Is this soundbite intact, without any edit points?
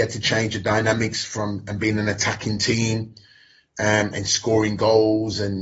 yes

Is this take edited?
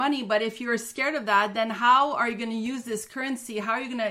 no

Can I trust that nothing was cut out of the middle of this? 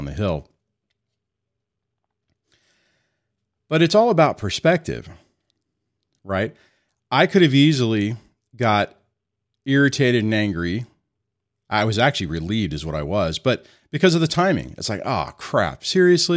yes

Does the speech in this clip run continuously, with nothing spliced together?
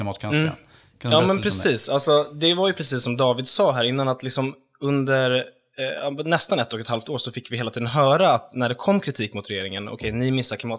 yes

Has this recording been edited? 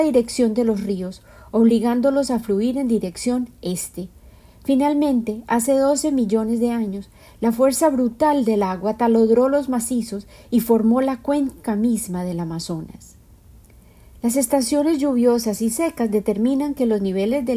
no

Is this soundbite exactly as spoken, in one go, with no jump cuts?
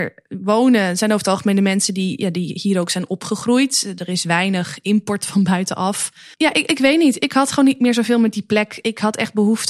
no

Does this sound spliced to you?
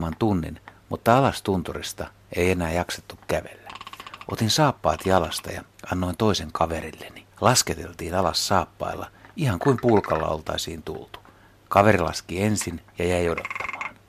yes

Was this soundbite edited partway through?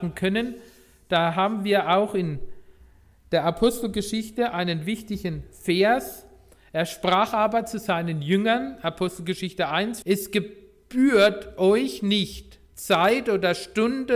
yes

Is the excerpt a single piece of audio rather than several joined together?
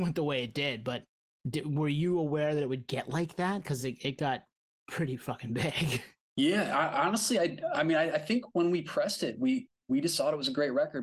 yes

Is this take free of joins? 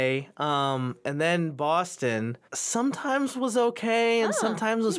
no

